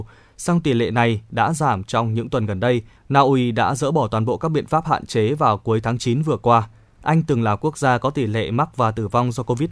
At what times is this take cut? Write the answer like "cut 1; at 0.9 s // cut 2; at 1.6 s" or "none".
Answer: cut 1; at 3.0 s // cut 2; at 6.9 s